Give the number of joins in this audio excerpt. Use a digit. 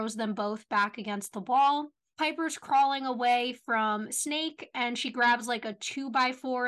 1